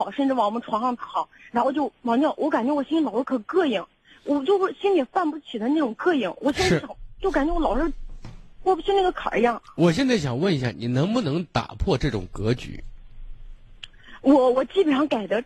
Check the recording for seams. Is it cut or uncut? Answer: uncut